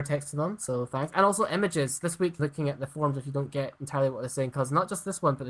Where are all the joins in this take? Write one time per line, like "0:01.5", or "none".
0:02.4